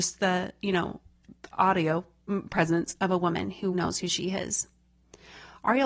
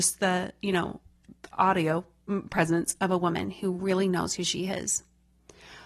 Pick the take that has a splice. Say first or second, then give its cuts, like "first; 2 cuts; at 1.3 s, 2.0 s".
first; 1 cut; at 3.7 s